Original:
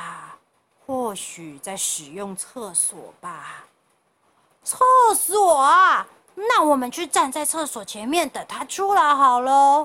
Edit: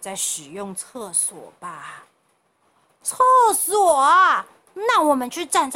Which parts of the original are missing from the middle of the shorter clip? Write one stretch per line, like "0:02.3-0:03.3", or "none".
none